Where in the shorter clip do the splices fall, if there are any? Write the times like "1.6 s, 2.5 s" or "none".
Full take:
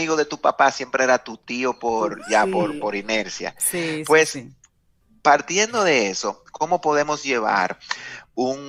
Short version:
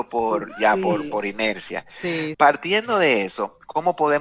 2.3 s

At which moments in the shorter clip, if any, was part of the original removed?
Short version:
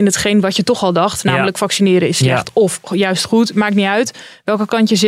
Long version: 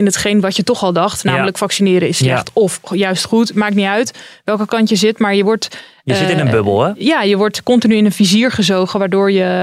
none

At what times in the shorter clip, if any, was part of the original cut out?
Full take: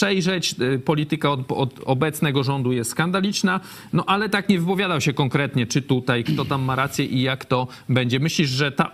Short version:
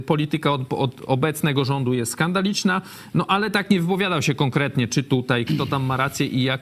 none

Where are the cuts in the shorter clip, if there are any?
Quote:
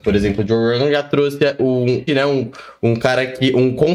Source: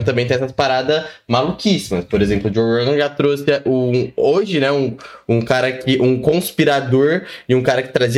2.1 s

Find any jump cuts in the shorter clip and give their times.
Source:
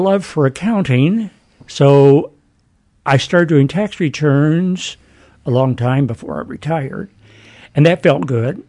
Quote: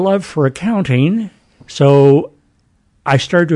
none

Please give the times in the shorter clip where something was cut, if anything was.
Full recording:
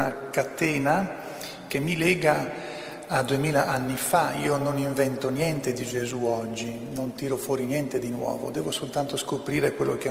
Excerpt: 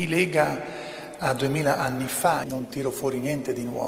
2.4 s

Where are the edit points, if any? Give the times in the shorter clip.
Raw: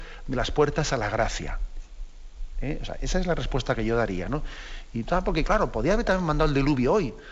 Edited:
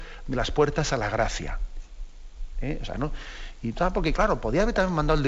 2.9 s

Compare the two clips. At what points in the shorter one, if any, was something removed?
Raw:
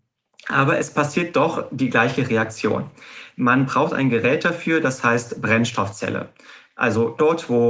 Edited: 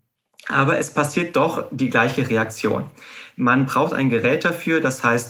none

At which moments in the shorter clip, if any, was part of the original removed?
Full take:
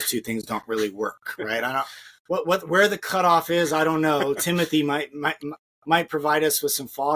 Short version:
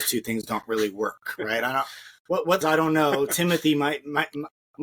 2.6 s

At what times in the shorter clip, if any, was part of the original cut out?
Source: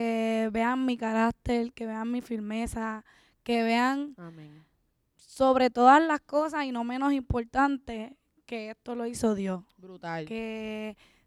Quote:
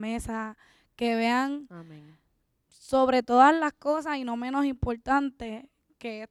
none

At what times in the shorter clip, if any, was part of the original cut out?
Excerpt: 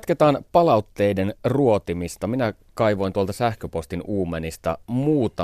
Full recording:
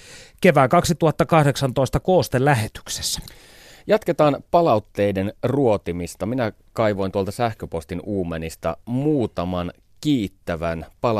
none

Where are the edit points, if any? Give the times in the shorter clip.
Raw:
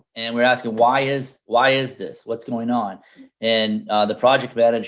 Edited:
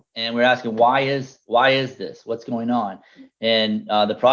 none

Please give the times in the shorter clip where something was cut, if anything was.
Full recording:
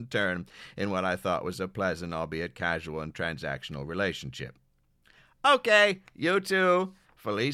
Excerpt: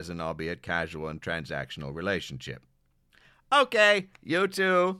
none

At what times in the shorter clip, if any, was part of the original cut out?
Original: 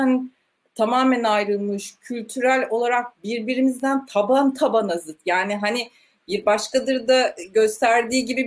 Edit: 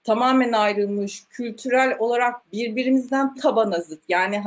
3.3 s

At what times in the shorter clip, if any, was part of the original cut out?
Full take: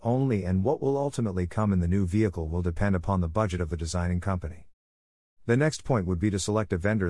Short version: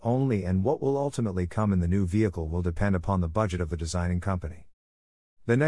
none

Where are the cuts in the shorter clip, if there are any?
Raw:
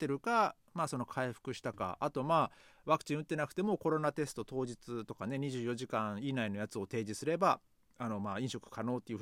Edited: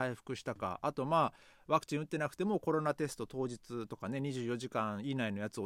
none

